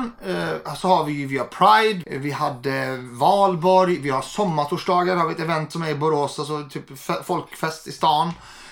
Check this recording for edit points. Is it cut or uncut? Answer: cut